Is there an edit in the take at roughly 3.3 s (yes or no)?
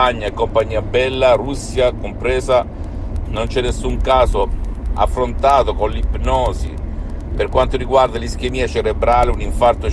yes